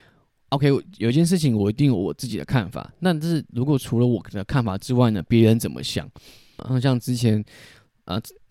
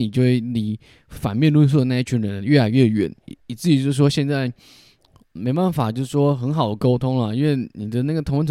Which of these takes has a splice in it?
first; 1 cut; at 6.6 s

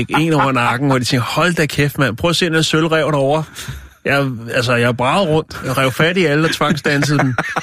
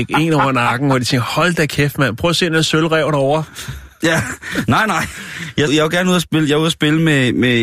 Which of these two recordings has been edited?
second; 2 cuts; at 4.0 s, 5.7 s

